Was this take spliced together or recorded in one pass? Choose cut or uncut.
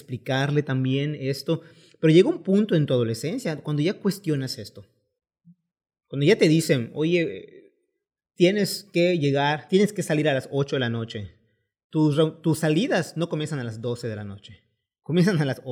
uncut